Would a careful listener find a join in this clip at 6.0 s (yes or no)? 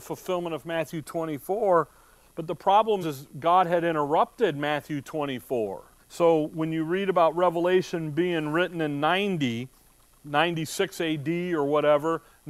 yes